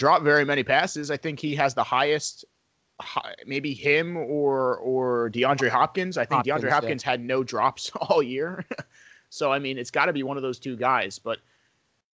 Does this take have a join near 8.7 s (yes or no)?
no